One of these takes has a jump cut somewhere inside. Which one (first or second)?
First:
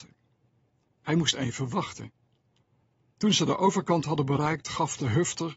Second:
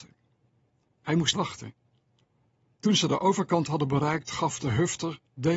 second